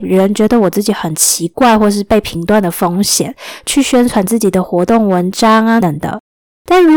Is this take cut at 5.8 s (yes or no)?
yes